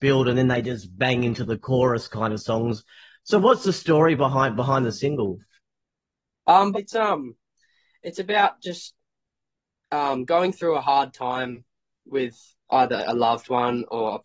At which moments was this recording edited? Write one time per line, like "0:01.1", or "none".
0:06.7